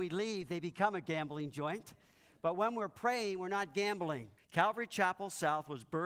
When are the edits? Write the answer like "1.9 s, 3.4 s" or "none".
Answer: 4.4 s